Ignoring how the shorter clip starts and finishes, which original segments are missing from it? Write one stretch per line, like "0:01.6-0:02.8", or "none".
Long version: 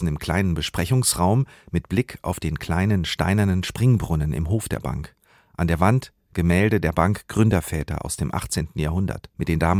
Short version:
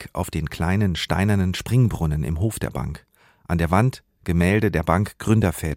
none